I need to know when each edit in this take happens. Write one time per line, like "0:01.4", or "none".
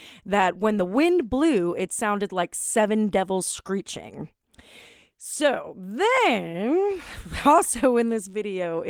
none